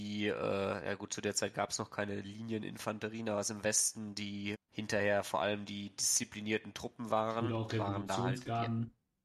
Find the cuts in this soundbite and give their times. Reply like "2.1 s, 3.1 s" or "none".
4.5 s